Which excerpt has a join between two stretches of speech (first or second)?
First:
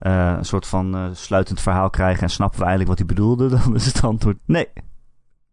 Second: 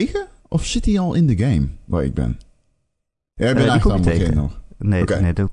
first